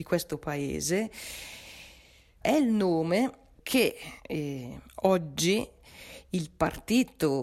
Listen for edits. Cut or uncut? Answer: cut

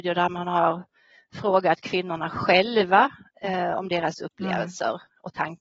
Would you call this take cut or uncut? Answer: uncut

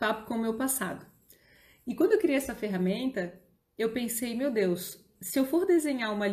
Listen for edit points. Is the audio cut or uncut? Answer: uncut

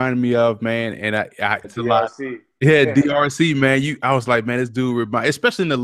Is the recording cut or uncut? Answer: cut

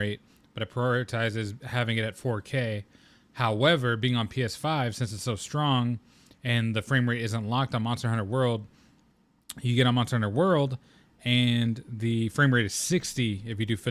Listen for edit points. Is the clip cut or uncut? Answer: uncut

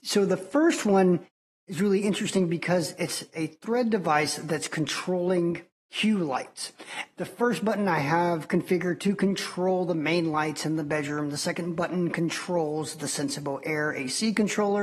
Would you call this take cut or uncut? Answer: cut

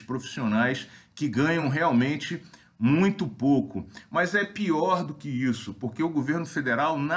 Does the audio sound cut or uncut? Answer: uncut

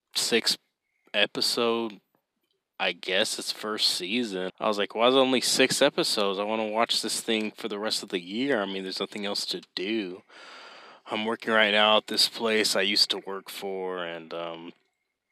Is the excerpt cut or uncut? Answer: cut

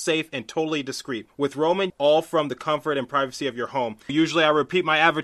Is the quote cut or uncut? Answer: cut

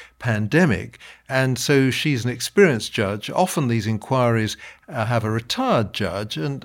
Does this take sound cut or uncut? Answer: uncut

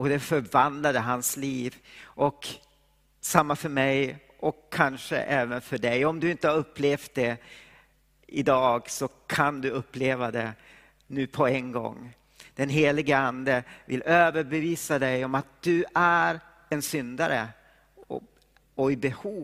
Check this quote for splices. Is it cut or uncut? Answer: uncut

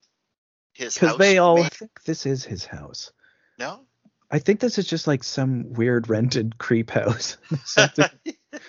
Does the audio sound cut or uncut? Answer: cut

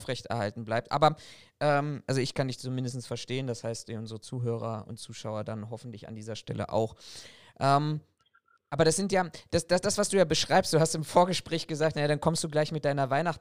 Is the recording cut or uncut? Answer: uncut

